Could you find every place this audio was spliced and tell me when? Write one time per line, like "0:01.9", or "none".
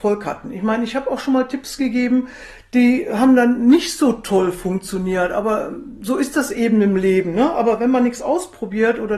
none